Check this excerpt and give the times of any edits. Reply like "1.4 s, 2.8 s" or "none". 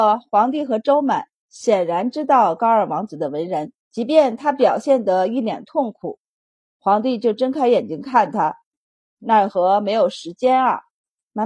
3.8 s, 6.7 s, 9.0 s

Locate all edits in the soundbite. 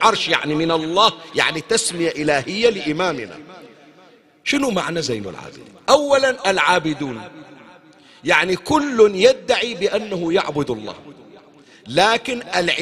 none

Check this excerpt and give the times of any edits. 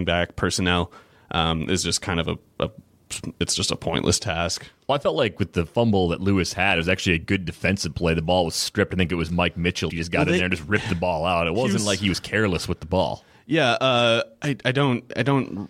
9.9 s

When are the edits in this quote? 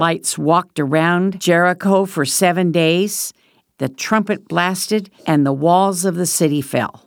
3.7 s, 5.2 s

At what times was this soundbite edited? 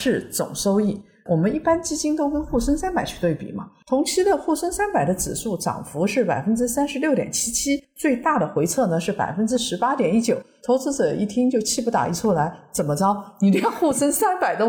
none

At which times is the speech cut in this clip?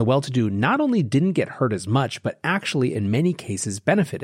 none

